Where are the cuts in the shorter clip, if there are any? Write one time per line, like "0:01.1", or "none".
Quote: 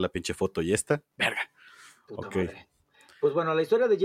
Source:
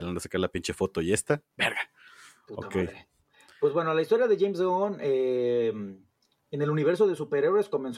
none